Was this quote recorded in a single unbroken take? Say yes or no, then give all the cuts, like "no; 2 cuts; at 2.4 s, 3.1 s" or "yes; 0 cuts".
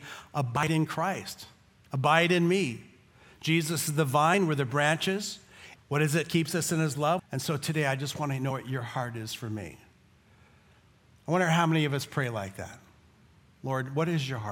no; 2 cuts; at 5.8 s, 7.2 s